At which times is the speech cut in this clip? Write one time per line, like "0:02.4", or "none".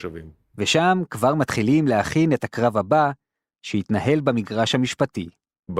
none